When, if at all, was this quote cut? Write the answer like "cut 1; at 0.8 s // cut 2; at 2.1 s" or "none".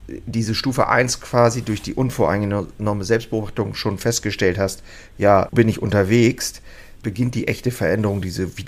cut 1; at 5.5 s // cut 2; at 7.0 s